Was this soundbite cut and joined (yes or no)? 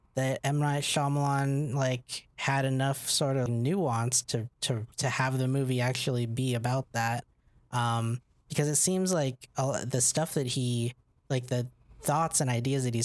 yes